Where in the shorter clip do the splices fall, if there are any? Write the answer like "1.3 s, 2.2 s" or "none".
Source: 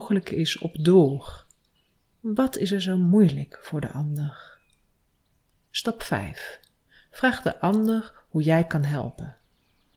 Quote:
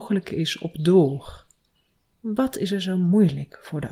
none